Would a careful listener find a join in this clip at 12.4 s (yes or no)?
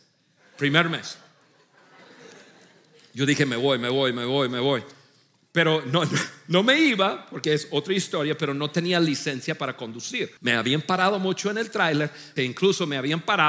yes